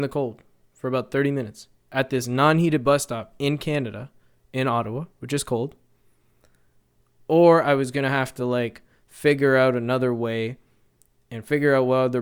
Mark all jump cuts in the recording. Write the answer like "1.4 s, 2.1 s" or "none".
none